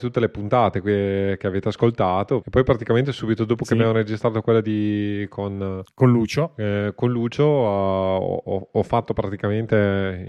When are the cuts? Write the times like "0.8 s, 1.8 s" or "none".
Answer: 2.4 s